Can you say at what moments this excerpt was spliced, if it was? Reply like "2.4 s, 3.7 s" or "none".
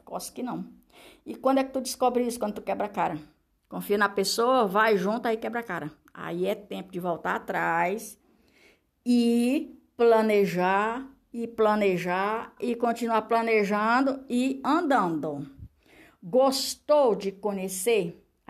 12.6 s